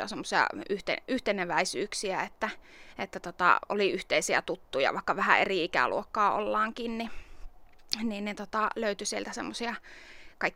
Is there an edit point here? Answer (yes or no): no